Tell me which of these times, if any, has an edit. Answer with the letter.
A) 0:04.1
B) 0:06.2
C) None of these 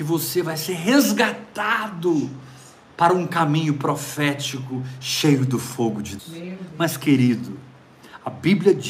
B